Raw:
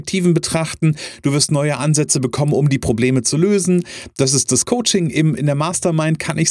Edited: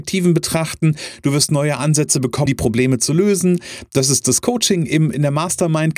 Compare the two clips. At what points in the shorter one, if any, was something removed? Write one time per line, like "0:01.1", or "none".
0:02.5

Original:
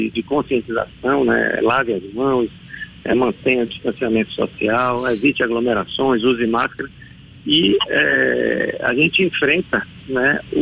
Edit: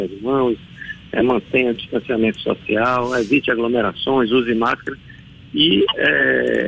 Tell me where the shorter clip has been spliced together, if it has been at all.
none

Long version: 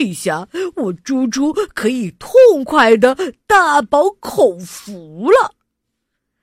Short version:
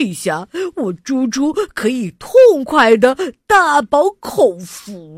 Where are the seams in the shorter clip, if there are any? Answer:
none

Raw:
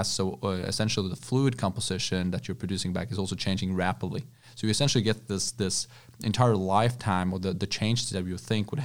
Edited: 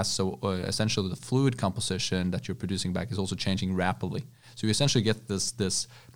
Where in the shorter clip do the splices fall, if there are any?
none

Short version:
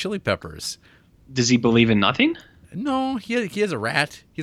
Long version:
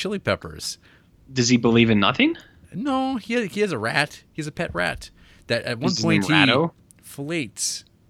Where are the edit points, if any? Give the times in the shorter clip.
none

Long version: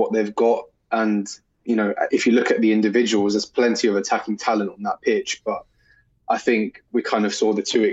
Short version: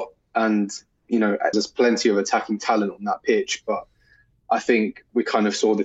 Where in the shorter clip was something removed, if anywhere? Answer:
0:01.5

